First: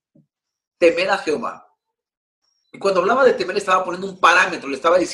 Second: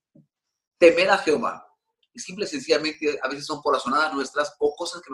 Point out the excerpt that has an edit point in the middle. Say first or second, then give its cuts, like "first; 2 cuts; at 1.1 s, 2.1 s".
second; 1 cut; at 2.0 s